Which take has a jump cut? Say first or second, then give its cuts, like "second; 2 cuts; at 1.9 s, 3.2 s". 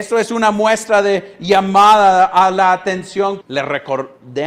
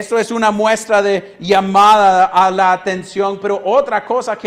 first; 1 cut; at 3.4 s